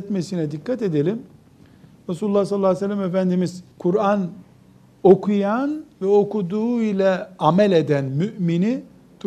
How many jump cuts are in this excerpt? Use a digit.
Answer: 1